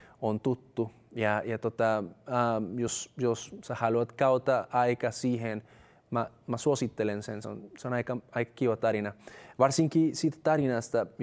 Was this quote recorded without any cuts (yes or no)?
yes